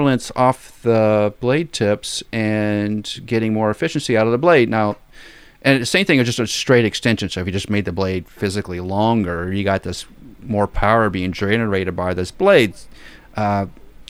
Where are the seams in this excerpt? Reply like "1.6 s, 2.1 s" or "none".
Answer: none